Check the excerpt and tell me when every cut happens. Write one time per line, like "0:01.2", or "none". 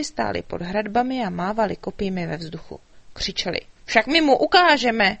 0:03.8